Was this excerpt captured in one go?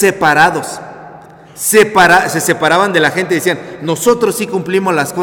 yes; 0 cuts

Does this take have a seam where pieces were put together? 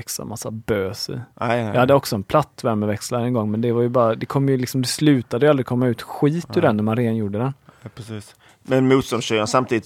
no; 0 cuts

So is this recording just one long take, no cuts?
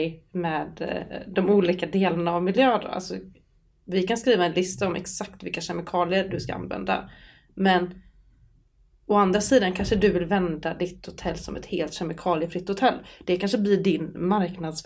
yes; 0 cuts

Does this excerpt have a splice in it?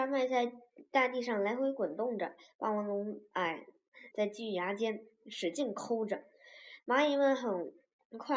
yes; 1 cut; at 4.1 s

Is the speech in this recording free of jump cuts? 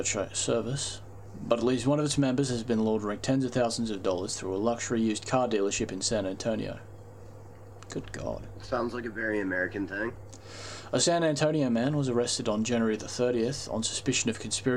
yes; 0 cuts

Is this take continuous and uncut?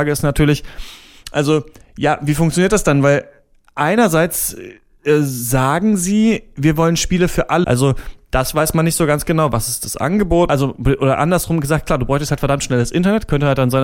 no; 2 cuts; at 7.6 s, 10.5 s

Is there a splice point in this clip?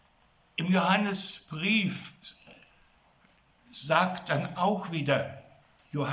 no; 0 cuts

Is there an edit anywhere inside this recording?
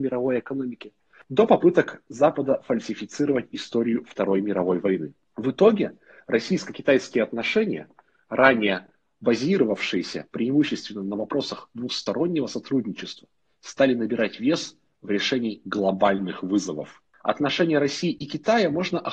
no; 0 cuts

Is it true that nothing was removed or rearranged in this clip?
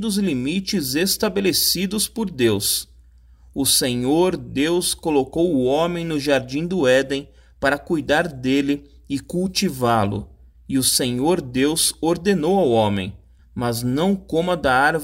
no; 1 cut; at 13.4 s

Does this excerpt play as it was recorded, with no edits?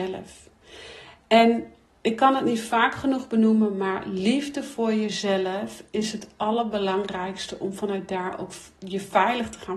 yes; 0 cuts

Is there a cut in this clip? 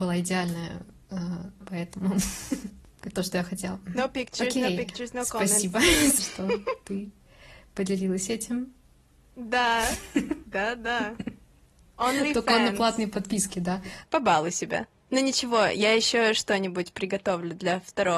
yes; 3 cuts; at 1.6 s, 6.2 s, 14.0 s

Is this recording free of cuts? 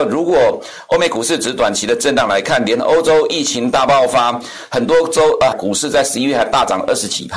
no; 1 cut; at 5.5 s

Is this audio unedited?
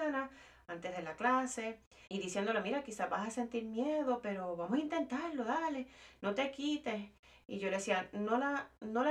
no; 1 cut; at 2.1 s

